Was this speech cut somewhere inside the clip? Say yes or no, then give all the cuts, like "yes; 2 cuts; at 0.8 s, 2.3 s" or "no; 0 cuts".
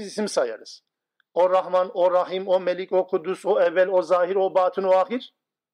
no; 0 cuts